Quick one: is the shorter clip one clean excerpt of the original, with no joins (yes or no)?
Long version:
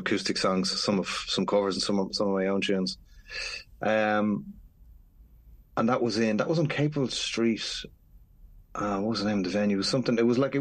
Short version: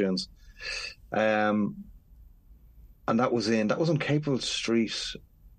yes